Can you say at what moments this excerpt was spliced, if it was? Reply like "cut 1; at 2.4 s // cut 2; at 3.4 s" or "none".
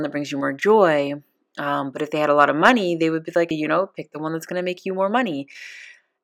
cut 1; at 3.5 s